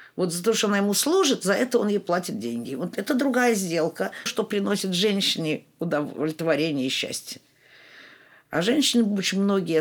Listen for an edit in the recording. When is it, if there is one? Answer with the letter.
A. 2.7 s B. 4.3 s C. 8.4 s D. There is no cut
B